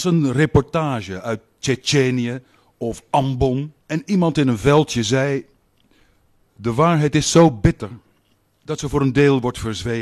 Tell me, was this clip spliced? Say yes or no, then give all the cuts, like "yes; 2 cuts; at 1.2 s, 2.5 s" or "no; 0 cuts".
yes; 1 cut; at 3.8 s